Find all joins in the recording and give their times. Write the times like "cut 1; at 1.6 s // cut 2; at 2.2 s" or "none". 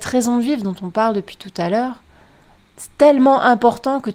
cut 1; at 2.6 s